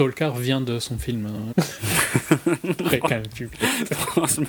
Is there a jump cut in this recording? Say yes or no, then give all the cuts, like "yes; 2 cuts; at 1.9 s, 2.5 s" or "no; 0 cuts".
yes; 1 cut; at 1.5 s